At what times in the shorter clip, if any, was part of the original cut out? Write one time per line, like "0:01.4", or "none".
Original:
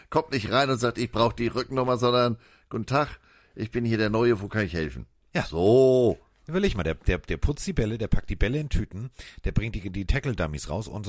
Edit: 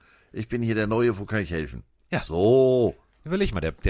none